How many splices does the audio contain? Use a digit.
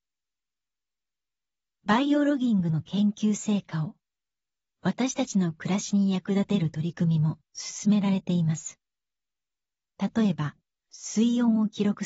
1